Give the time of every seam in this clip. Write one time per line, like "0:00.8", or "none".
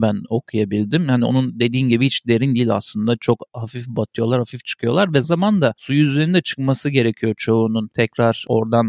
0:05.2